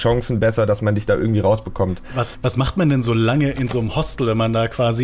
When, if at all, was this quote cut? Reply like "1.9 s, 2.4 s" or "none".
none